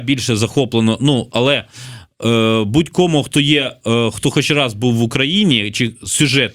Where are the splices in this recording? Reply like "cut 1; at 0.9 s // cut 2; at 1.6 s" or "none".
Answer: none

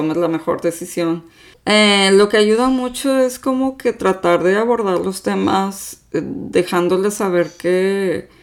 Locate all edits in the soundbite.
cut 1; at 1.5 s

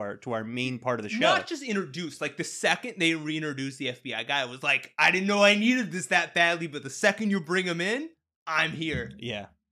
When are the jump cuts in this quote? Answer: none

